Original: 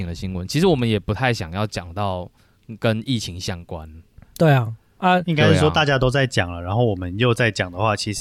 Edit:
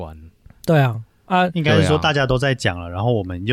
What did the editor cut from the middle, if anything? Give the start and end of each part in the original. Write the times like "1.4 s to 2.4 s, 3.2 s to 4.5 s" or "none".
none